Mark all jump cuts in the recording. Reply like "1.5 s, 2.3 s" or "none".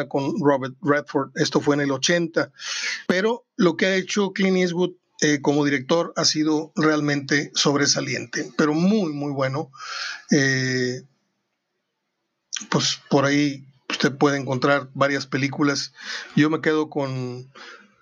3.1 s